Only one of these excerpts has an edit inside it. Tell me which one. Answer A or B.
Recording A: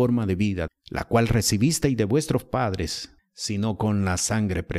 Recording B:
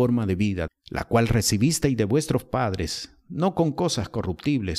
A